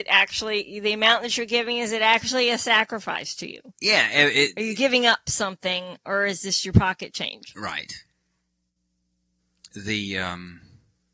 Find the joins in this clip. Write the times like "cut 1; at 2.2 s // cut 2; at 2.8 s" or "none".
none